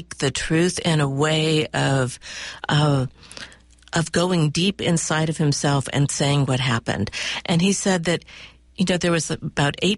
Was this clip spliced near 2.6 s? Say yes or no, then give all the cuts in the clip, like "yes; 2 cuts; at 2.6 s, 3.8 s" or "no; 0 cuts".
no; 2 cuts; at 7.4 s, 8.7 s